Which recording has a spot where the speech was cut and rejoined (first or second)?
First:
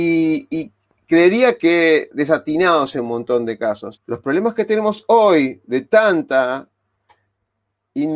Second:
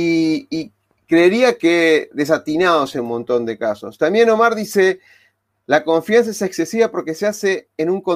first